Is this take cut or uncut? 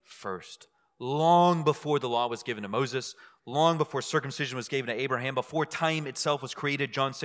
uncut